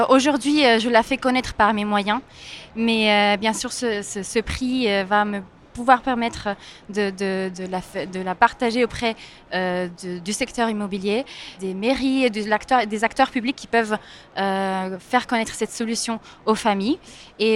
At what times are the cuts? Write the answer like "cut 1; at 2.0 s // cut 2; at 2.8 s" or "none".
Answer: cut 1; at 7.5 s // cut 2; at 11.6 s